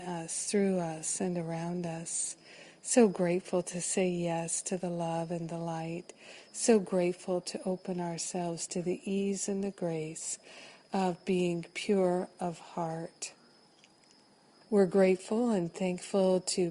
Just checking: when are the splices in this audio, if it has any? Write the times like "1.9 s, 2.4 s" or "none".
14.6 s